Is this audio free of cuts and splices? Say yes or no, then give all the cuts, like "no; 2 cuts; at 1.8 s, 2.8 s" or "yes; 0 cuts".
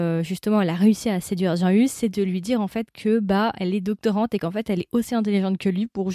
yes; 0 cuts